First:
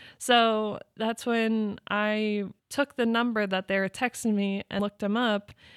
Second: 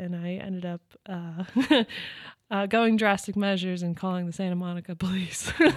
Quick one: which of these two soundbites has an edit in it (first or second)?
first